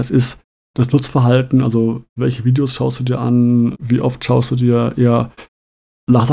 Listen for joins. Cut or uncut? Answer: cut